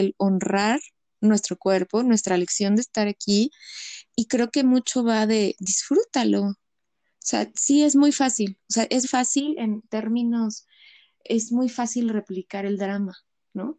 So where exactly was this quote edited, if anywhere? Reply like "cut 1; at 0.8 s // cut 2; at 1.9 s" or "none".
cut 1; at 9.0 s

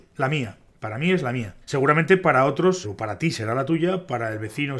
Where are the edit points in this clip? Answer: cut 1; at 1.6 s // cut 2; at 2.8 s

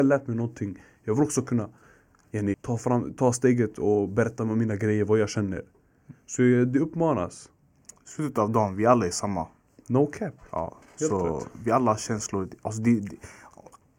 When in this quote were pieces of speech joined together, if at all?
cut 1; at 2.5 s

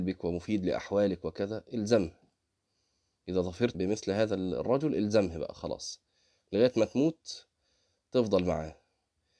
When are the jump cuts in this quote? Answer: cut 1; at 3.7 s

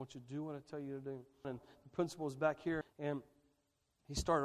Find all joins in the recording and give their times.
cut 1; at 1.4 s // cut 2; at 2.8 s

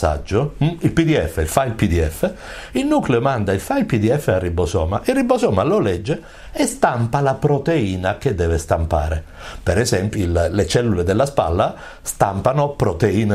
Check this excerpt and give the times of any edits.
cut 1; at 10.1 s

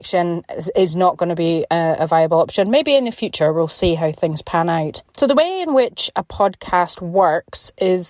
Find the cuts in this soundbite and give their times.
none

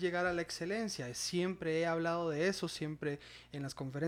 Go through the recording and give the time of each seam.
none

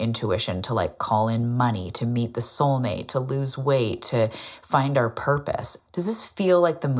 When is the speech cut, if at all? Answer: cut 1; at 5.8 s

